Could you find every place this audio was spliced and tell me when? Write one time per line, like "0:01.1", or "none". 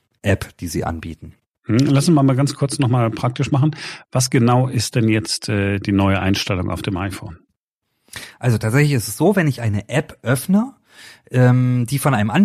none